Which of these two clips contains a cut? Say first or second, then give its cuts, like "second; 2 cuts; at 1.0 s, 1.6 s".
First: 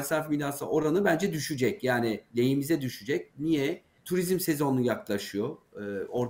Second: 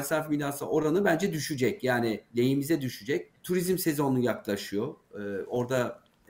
second; 1 cut; at 3.3 s